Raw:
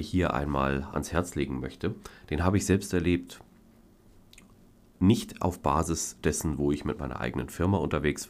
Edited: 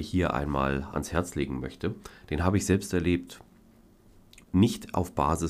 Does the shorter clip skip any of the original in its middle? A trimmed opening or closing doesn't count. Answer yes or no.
yes